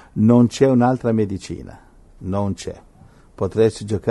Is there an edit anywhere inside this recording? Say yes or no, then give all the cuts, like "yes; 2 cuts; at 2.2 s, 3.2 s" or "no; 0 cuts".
no; 0 cuts